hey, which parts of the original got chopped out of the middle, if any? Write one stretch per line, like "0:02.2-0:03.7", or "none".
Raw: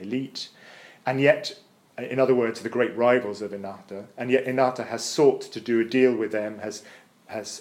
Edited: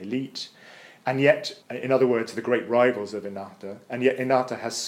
0:01.6-0:01.9